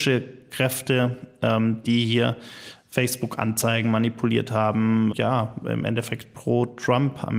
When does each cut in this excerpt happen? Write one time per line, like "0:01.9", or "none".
0:05.1